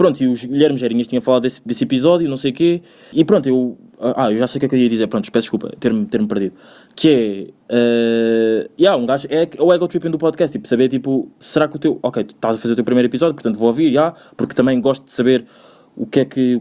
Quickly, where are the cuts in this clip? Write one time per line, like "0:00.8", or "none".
0:03.1